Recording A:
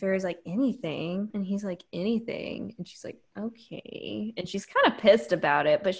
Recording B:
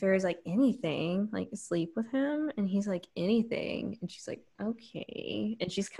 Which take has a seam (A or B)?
A